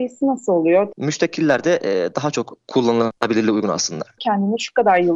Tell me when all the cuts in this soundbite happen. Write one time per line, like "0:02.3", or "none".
0:00.9
0:04.2